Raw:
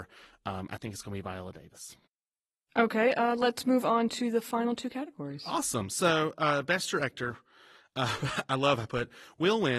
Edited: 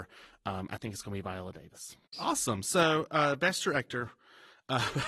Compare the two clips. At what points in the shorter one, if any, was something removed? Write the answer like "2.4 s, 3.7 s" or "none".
2.1 s